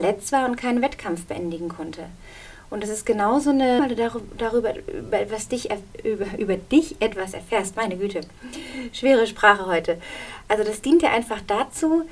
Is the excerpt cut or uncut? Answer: cut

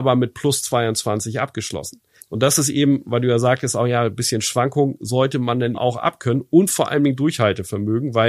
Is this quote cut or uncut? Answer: cut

